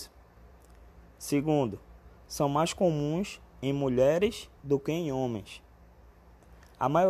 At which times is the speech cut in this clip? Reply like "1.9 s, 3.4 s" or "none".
none